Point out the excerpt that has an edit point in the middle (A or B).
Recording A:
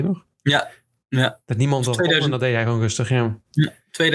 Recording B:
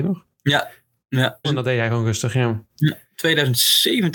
B